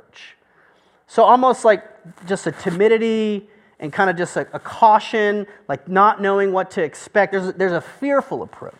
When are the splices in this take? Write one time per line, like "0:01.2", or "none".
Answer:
none